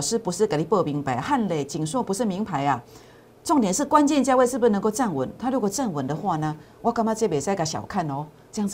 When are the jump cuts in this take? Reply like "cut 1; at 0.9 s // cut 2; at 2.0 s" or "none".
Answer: none